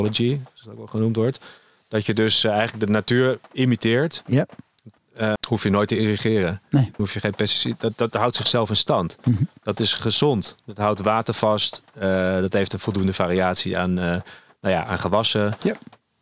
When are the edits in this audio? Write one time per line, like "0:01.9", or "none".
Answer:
0:05.4
0:07.0